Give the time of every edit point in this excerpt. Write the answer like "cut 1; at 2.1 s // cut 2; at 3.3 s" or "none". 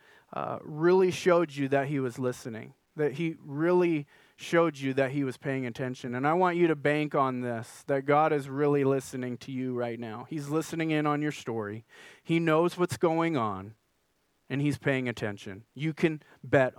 none